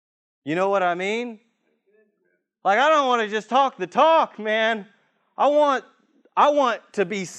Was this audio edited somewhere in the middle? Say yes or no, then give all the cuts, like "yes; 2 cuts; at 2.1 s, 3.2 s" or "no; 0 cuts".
no; 0 cuts